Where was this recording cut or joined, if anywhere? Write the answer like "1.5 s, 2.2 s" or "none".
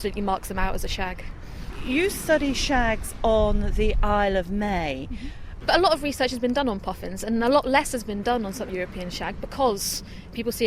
5.6 s, 8.7 s